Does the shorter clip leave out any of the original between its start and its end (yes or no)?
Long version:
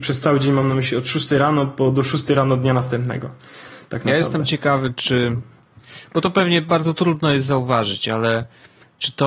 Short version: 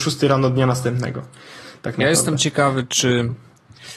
no